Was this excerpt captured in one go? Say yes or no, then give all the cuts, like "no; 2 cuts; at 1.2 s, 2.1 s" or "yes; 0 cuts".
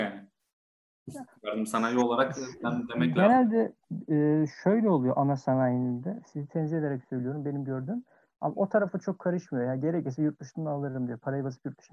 yes; 0 cuts